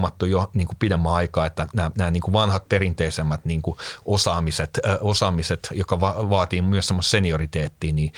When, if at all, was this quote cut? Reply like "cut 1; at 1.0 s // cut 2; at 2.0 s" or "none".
none